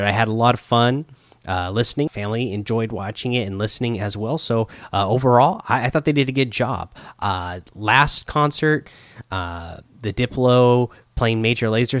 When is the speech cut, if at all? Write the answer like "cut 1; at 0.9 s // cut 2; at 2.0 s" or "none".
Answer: cut 1; at 2.1 s